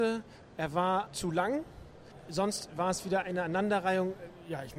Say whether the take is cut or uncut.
cut